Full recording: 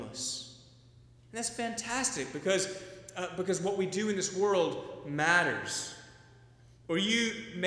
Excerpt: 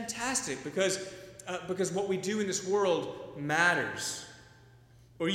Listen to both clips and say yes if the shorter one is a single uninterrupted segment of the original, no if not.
yes